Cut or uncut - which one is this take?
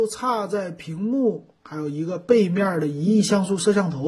uncut